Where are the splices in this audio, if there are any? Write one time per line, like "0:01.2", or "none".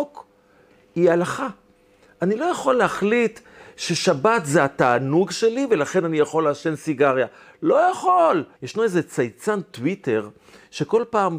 0:08.6